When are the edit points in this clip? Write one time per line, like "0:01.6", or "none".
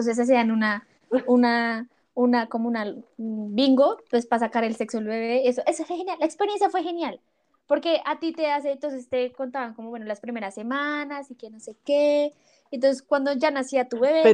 none